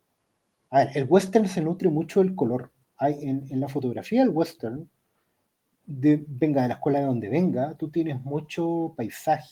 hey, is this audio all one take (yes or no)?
yes